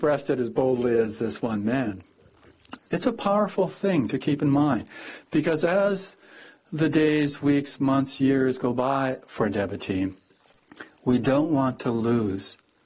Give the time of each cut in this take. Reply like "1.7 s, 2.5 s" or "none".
2.8 s

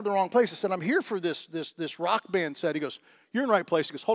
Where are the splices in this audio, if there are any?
none

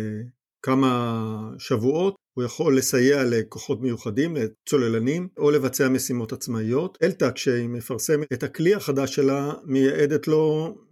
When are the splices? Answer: none

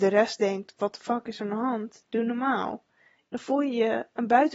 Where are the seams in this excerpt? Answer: 3.3 s

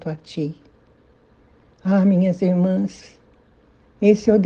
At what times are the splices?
none

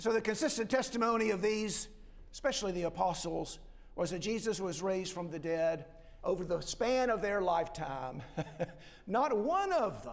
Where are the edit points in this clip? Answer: 6.2 s

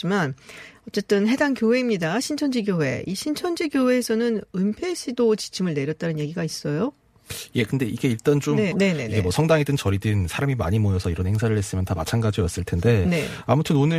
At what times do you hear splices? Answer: 8.7 s

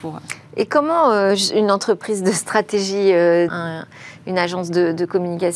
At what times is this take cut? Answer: 3.5 s

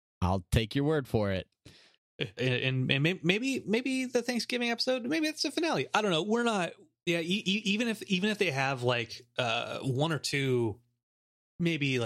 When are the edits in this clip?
2.4 s, 6.9 s

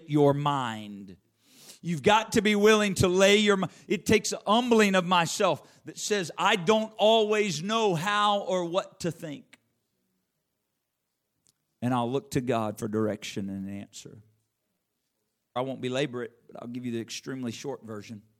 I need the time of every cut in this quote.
3.9 s, 15.6 s

